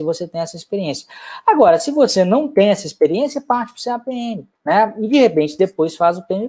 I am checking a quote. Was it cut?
yes; 1 cut; at 4.6 s

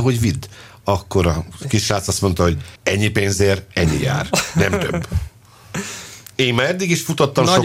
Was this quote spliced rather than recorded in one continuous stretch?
yes; 1 cut; at 2.8 s

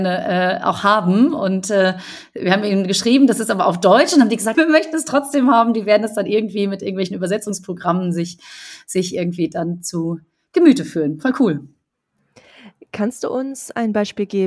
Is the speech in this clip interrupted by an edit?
yes; 1 cut; at 4.5 s

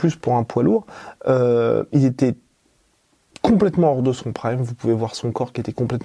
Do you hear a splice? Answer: no; 0 cuts

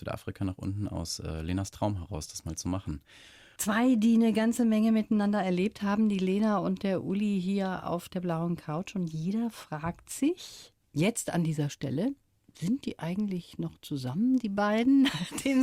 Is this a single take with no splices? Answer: no; 1 cut; at 3.6 s

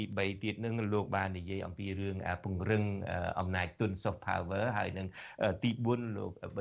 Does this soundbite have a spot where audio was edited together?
no; 0 cuts

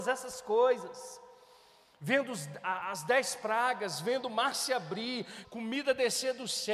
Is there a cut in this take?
yes; 1 cut; at 5.4 s

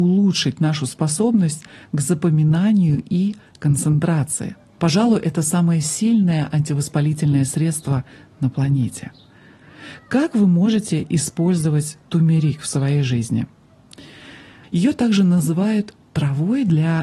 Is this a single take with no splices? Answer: no; 2 cuts; at 4.8 s, 14.6 s

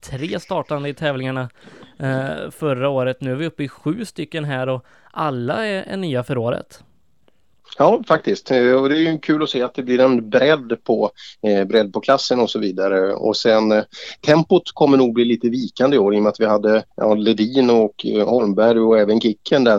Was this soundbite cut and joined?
yes; 1 cut; at 16.9 s

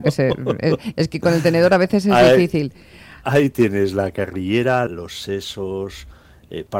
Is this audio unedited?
no; 1 cut; at 4.9 s

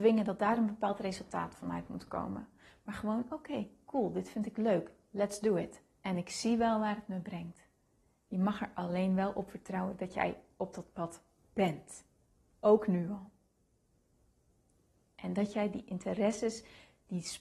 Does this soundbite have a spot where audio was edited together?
yes; 1 cut; at 8.3 s

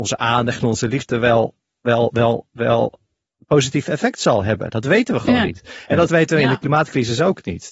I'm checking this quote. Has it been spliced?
no; 0 cuts

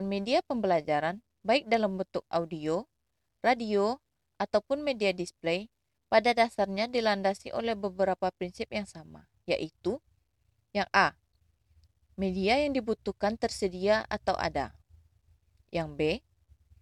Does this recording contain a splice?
no; 0 cuts

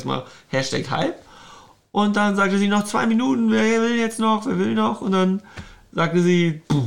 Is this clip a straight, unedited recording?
yes; 0 cuts

